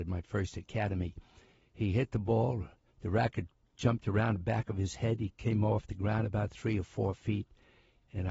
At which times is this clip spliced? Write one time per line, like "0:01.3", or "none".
0:01.6